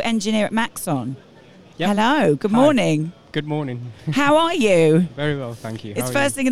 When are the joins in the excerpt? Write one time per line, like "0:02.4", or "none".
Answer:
none